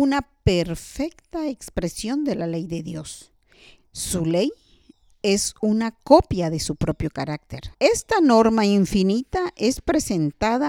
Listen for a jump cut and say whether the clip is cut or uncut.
cut